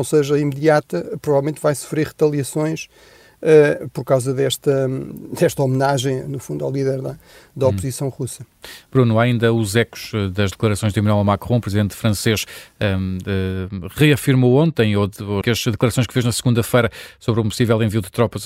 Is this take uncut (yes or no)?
no